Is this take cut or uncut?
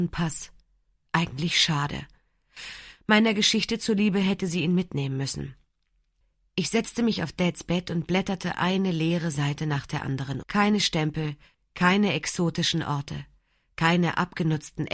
cut